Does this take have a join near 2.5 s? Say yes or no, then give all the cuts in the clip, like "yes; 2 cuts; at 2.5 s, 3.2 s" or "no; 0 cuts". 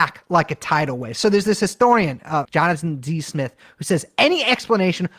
yes; 1 cut; at 2.5 s